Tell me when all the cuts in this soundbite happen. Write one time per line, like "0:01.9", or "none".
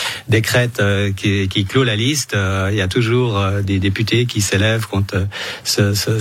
0:03.6